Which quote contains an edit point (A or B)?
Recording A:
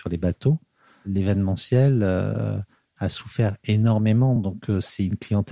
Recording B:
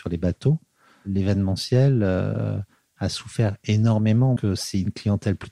B